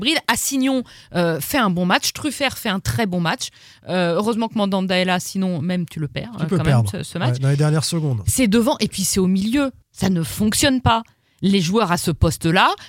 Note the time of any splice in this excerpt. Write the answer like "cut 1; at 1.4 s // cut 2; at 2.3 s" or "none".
cut 1; at 9.8 s